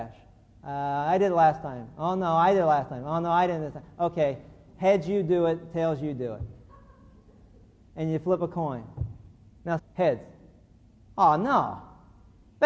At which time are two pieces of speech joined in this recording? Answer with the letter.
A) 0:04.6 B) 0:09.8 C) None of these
B